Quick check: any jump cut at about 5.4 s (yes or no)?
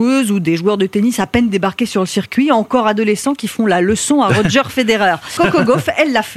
yes